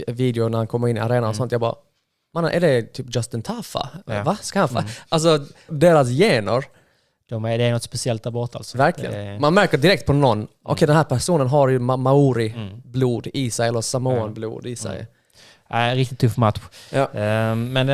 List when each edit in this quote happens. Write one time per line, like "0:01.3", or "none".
0:05.7